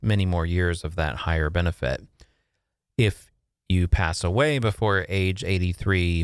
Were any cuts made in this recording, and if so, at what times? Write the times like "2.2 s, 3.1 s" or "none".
none